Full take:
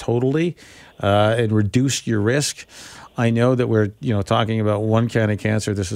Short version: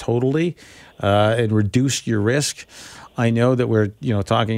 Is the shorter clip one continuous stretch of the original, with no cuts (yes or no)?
yes